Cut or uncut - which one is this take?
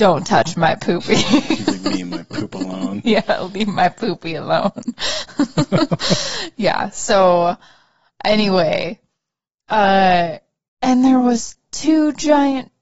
cut